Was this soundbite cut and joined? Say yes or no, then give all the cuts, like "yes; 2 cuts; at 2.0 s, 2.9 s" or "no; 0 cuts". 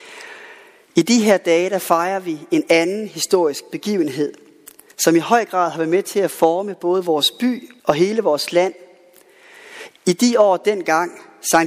yes; 1 cut; at 7.8 s